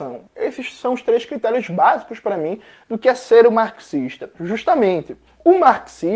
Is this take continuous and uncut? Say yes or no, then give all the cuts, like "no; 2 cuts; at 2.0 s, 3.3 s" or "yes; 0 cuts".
no; 1 cut; at 4.4 s